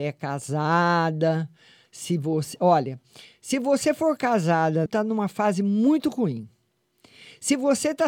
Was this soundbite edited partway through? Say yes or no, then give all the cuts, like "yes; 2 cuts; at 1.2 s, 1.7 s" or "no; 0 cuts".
yes; 1 cut; at 4.9 s